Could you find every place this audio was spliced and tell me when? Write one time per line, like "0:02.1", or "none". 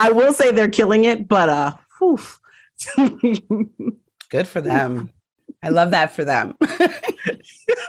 none